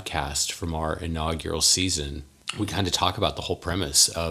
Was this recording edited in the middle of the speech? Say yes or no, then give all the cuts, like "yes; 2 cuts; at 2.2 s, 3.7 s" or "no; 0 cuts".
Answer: no; 0 cuts